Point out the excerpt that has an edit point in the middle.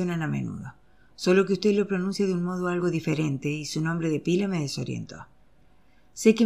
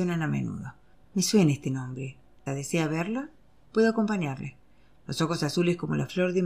second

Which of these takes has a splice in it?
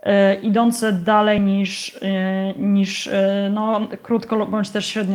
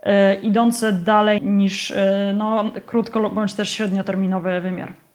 second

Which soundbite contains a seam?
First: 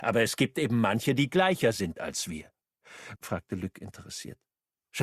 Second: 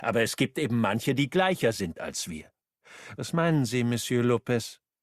first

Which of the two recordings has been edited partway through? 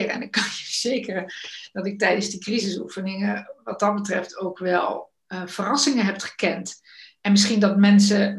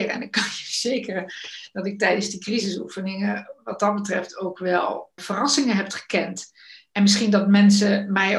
second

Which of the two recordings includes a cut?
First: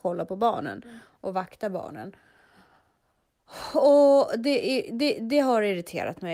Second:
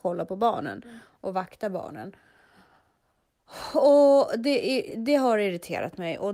second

